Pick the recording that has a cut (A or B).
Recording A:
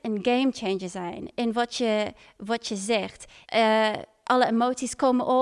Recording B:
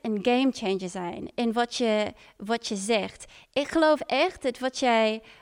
A